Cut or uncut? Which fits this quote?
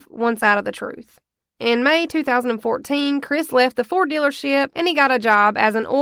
uncut